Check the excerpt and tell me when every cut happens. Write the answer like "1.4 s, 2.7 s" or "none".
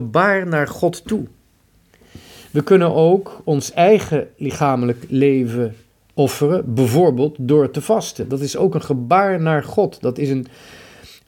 none